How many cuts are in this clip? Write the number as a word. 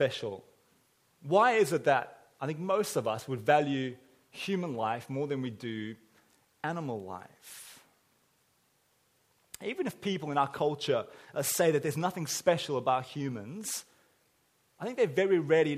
zero